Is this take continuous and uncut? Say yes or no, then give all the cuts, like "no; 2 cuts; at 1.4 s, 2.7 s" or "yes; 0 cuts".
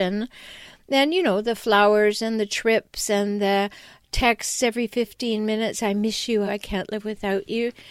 no; 1 cut; at 6.5 s